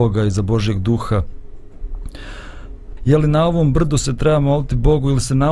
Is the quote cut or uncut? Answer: cut